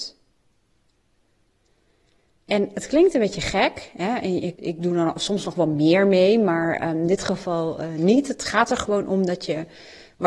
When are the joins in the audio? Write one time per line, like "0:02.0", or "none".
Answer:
0:04.6